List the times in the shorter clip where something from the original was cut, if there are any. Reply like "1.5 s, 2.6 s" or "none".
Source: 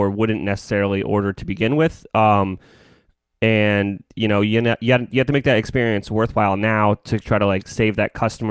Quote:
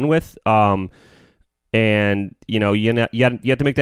none